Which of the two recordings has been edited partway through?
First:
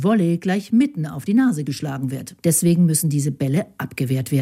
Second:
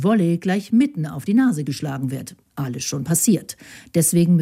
first; 1 cut; at 2.4 s

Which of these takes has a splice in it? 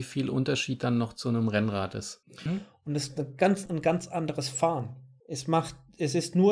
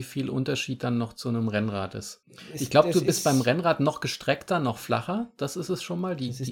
first; 3 cuts; at 2.5 s, 3.7 s, 5.2 s

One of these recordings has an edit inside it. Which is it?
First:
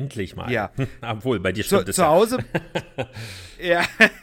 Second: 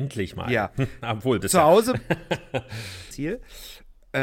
second; 2 cuts; at 1.4 s, 3.1 s

